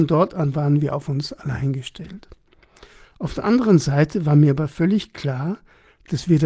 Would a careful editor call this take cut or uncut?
cut